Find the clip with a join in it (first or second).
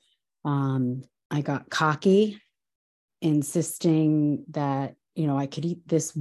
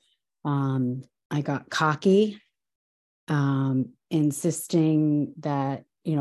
first